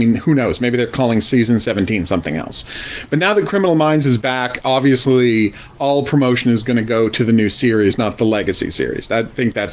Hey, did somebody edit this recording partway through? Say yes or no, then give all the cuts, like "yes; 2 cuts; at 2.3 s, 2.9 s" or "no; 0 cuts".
no; 0 cuts